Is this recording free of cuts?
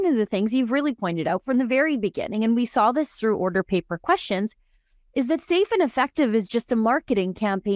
yes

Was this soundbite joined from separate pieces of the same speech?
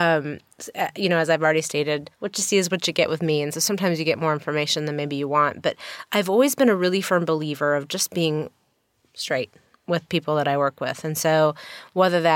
no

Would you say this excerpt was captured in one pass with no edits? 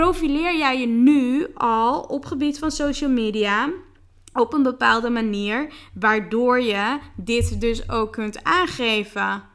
yes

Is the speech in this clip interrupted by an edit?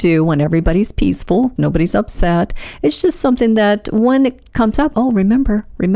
yes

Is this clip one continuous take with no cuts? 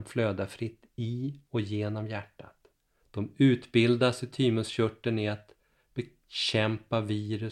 no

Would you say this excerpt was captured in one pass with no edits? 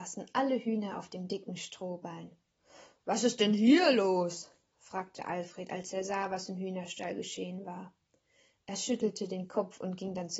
yes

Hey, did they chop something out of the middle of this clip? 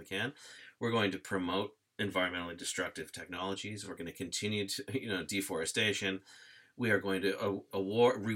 no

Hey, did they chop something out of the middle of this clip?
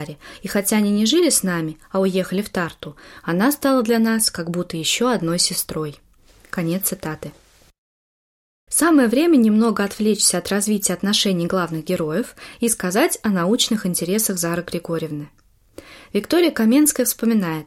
no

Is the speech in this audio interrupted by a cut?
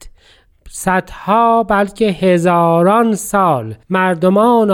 yes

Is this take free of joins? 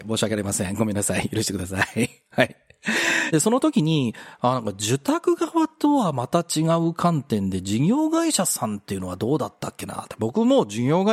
no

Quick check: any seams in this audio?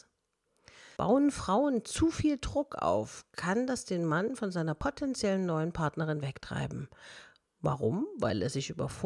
yes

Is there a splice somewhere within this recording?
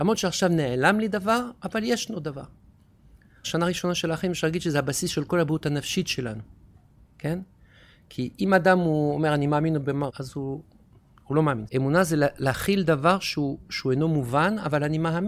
yes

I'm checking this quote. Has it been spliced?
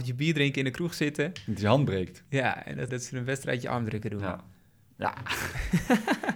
yes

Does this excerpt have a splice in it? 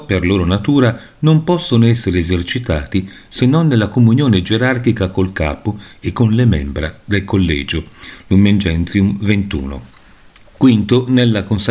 no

